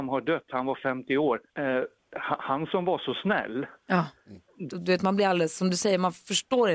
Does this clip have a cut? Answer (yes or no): yes